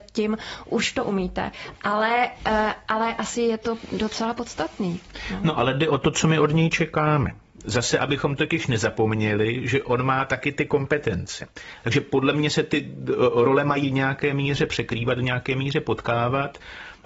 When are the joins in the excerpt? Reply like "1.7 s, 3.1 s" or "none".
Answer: 1.8 s, 11.8 s